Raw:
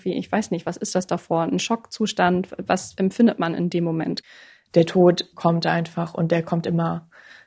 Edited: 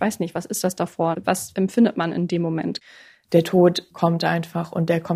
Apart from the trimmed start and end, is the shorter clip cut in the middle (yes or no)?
yes